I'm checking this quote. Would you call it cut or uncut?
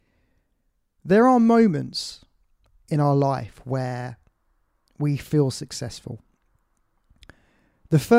uncut